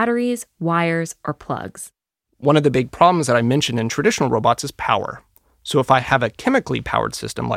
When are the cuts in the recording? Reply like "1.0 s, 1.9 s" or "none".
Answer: none